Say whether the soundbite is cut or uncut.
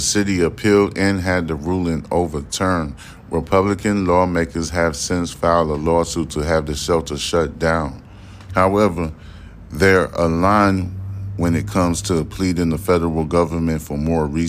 cut